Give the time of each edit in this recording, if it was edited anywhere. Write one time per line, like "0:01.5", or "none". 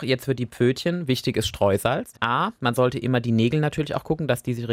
0:02.1

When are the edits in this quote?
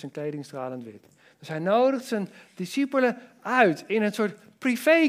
none

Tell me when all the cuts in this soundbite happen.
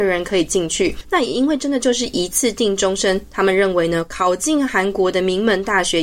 0:01.0

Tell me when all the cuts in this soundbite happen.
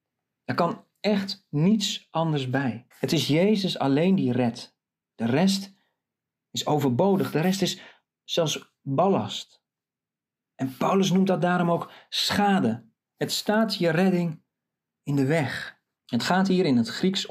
0:02.9
0:16.0

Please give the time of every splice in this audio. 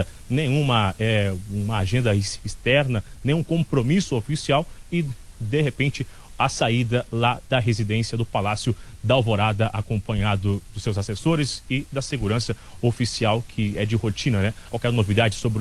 0:14.7

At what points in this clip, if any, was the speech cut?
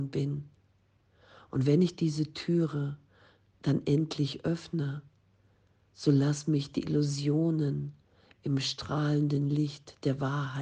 none

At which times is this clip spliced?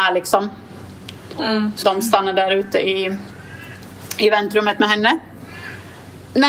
0:01.8

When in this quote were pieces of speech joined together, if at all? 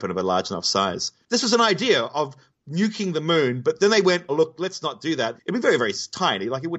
0:04.3
0:05.4

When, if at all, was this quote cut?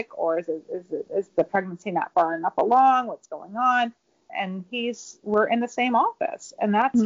0:04.3

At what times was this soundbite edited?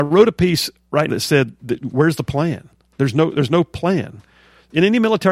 0:01.1

